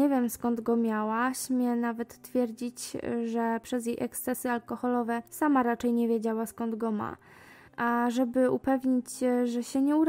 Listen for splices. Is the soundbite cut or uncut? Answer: cut